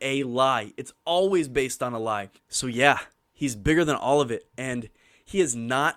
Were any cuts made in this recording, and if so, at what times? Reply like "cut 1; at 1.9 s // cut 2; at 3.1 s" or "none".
cut 1; at 2.4 s